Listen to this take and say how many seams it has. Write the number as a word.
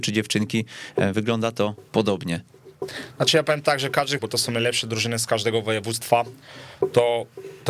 one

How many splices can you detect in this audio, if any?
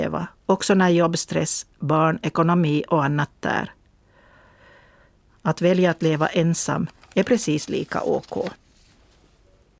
one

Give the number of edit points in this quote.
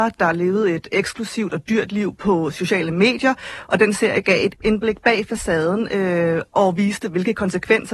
one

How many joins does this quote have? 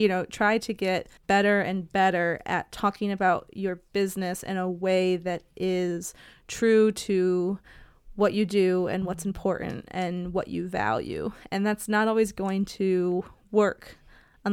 one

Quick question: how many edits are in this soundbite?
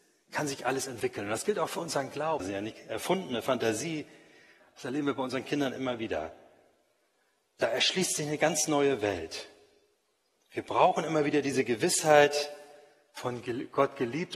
three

